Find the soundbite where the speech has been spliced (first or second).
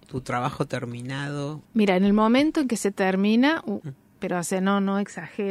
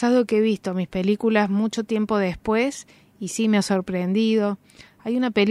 first